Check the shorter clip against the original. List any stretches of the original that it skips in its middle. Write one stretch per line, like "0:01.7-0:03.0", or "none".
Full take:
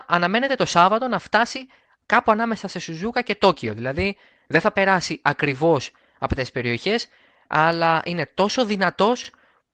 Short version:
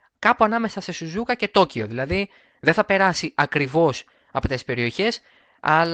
none